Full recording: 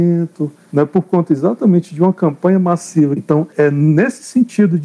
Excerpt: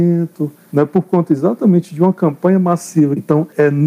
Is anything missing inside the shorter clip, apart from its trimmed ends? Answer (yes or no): no